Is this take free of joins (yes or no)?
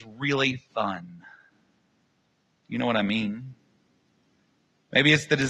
yes